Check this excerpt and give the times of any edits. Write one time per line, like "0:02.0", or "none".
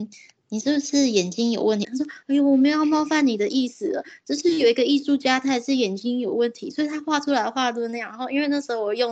0:01.8